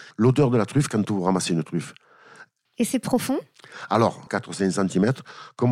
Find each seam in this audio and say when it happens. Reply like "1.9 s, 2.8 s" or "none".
2.7 s, 4.3 s